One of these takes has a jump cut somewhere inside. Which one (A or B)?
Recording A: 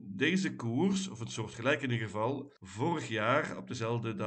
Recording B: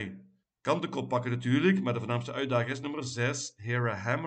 A